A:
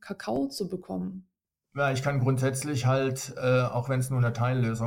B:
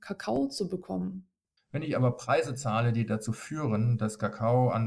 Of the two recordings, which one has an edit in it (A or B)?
B